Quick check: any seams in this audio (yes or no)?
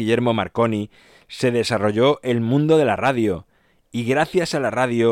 no